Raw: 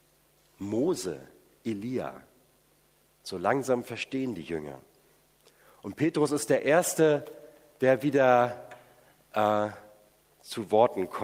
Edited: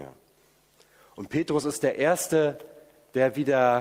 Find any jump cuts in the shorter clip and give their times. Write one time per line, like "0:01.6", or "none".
none